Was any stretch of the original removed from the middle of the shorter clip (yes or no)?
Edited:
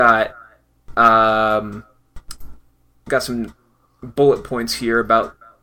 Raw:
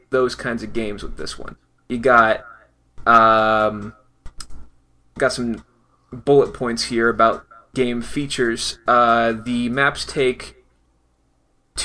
no